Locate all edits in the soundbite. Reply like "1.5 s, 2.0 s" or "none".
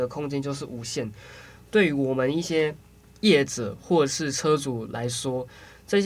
none